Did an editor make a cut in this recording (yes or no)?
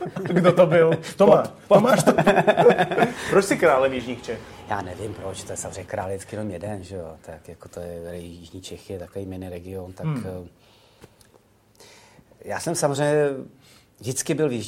yes